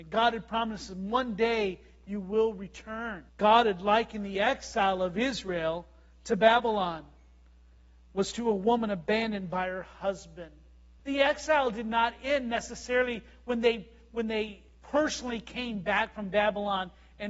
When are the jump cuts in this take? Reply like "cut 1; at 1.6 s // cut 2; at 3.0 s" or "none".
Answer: cut 1; at 3.3 s // cut 2; at 11.0 s